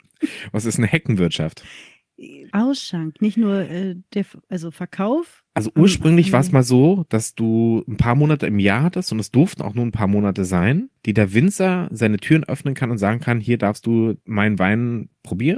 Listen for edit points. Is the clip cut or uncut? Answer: cut